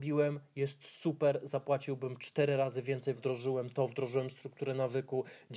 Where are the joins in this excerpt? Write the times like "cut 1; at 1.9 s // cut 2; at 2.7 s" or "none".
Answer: cut 1; at 3.2 s